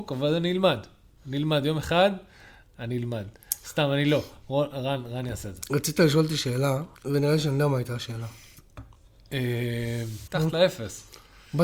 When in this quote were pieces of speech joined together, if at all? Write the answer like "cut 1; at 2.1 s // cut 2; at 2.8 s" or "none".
cut 1; at 7.0 s // cut 2; at 10.3 s